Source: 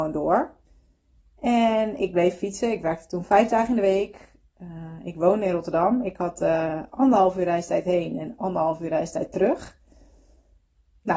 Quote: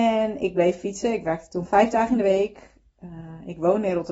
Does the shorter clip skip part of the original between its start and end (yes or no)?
no